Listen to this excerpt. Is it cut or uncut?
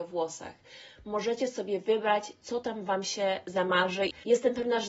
uncut